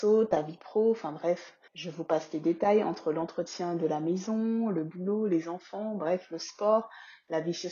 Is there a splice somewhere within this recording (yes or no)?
yes